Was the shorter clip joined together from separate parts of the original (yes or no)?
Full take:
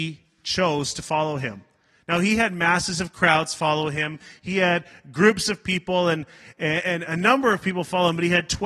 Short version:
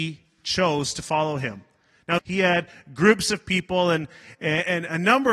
yes